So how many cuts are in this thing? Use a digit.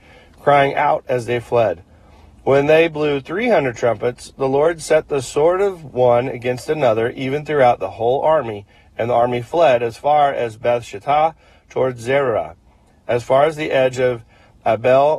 0